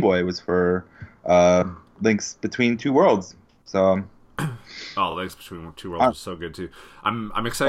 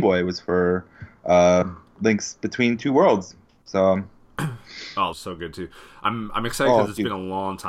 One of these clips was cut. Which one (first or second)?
second